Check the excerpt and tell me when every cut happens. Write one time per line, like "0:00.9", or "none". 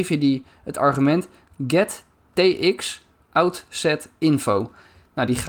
none